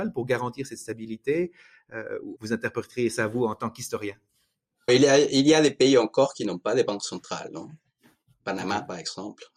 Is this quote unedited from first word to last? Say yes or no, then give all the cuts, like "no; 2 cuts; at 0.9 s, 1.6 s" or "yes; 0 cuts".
no; 2 cuts; at 2.4 s, 4.9 s